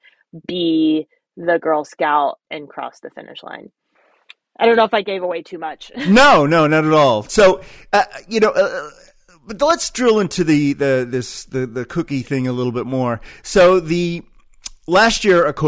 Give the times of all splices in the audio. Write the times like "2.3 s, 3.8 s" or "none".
none